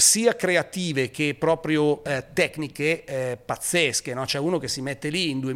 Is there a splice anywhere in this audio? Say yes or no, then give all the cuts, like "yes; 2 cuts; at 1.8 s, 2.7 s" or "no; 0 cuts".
no; 0 cuts